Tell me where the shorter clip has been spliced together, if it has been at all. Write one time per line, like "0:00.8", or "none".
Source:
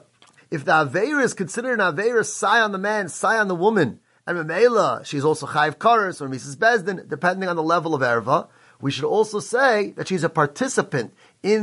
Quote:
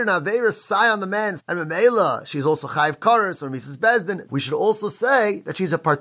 0:01.4
0:04.3